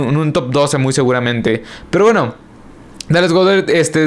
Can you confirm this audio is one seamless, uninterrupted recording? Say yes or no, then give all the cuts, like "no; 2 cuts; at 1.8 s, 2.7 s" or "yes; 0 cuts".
yes; 0 cuts